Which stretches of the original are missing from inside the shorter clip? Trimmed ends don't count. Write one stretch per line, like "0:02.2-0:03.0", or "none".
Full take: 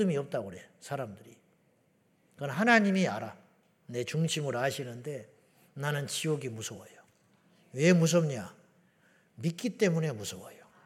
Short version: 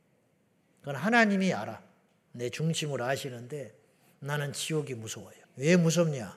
0:07.0-0:07.6